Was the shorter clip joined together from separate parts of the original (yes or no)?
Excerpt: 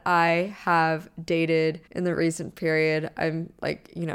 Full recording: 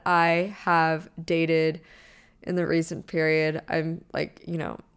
yes